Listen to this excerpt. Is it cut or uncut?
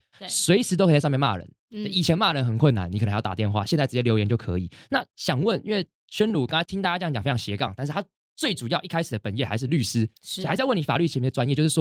cut